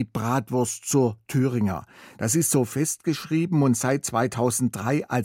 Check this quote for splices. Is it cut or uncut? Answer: cut